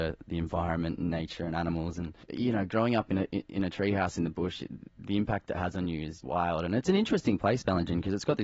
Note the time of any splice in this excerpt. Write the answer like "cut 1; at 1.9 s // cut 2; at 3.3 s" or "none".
cut 1; at 2.2 s // cut 2; at 6.2 s